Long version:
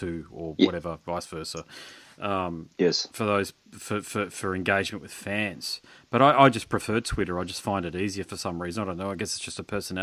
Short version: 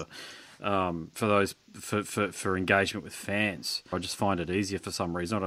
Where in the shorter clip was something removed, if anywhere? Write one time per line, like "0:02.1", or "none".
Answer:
0:01.1
0:03.9